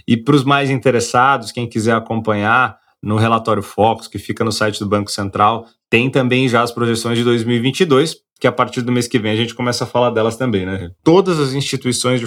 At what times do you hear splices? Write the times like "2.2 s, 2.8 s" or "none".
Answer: 11.0 s